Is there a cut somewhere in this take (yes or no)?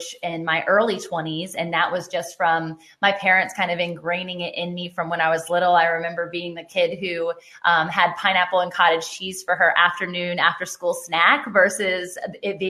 no